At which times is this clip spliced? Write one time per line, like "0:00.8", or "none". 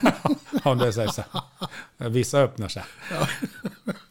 none